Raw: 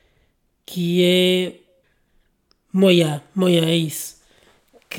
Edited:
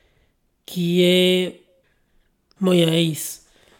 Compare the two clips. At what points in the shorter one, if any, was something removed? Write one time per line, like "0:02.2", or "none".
0:02.6